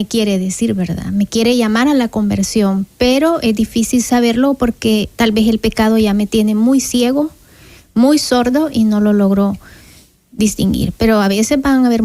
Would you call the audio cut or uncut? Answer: uncut